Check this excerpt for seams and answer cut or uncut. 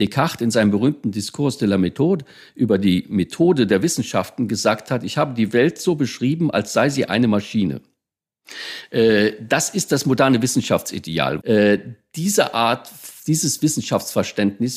cut